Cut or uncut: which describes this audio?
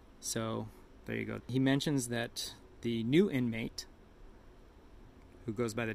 cut